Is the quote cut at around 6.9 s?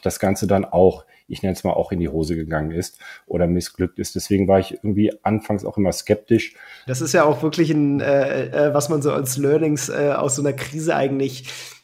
yes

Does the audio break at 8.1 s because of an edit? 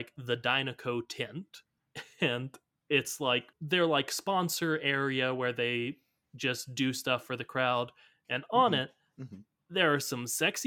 no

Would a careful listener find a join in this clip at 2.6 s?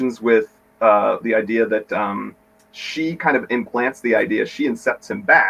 no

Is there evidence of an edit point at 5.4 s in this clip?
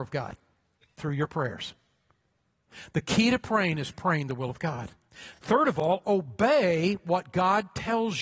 no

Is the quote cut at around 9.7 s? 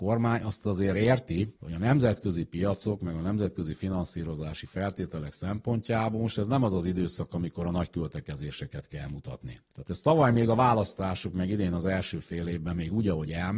yes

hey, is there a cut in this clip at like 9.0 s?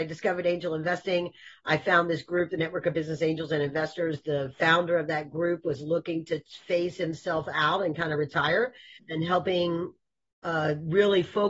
yes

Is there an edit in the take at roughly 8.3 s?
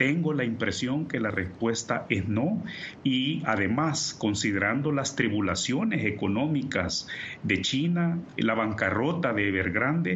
no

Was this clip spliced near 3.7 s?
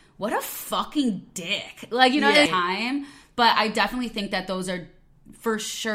no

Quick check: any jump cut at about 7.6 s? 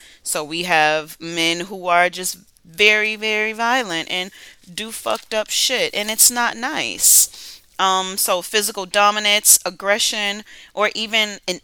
no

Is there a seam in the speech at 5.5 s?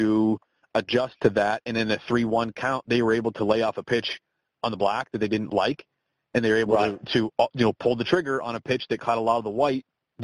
no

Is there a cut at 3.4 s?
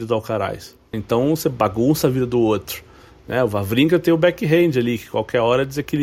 no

